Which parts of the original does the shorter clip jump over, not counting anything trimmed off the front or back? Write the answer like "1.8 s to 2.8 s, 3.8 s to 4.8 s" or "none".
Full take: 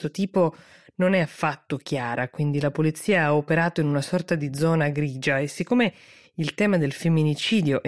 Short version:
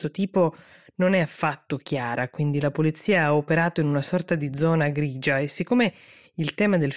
none

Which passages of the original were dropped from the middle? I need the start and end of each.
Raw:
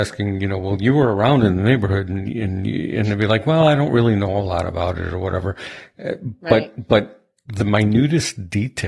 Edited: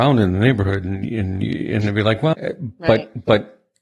3.6 s to 5.9 s

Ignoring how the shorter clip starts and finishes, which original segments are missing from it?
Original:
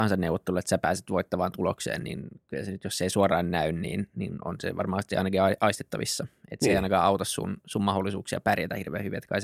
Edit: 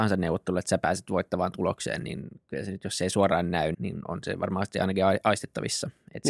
3.7 s to 4.1 s

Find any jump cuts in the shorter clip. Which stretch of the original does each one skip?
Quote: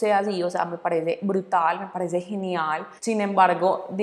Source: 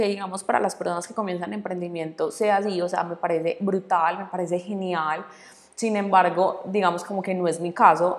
5.3 s to 5.7 s

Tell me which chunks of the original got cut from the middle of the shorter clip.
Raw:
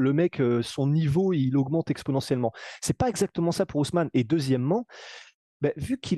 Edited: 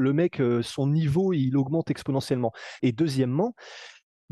2.8 s to 4.1 s

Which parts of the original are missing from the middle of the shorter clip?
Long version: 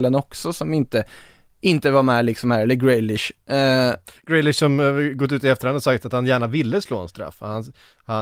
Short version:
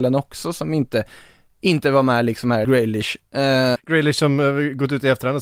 2.6 s to 2.8 s, 3.9 s to 4.2 s

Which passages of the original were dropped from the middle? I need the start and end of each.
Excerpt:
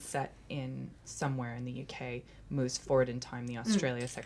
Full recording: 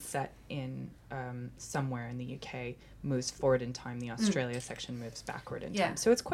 1.0 s to 1.6 s

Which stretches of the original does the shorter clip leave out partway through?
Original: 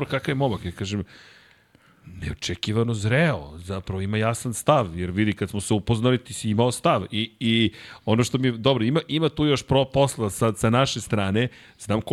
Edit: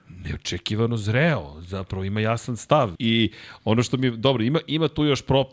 4.9 s to 7.4 s

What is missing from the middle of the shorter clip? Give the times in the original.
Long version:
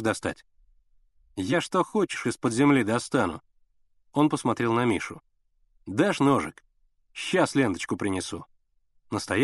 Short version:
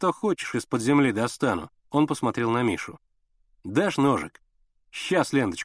3.5 s to 4.0 s

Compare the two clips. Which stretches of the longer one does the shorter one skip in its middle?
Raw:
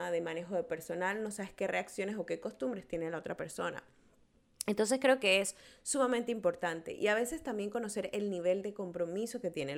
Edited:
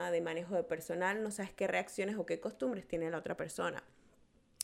none

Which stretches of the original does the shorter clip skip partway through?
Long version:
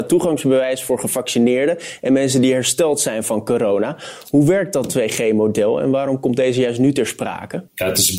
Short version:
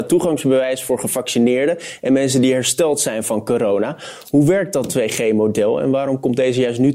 none

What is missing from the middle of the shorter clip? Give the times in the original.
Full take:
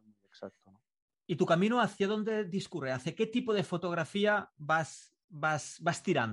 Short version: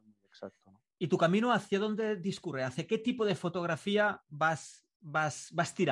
0.9 s to 1.2 s

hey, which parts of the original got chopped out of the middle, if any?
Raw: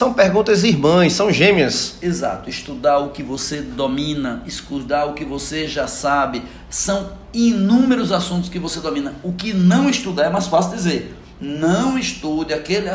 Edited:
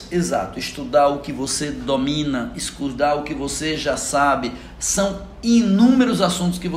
none

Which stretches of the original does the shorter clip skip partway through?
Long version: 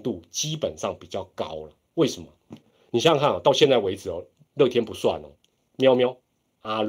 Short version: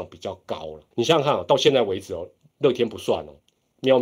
1.8 s to 2.9 s

